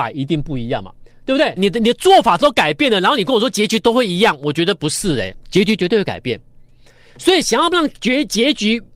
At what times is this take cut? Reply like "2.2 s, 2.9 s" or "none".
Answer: 1.6 s